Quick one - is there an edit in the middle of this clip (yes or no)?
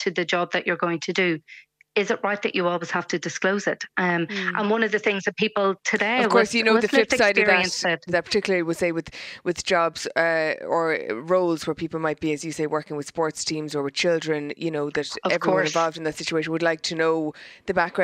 yes